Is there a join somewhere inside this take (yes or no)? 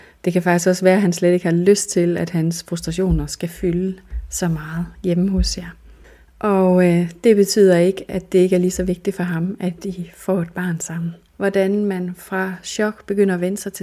yes